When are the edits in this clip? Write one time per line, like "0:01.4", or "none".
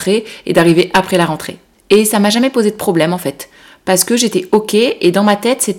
0:01.7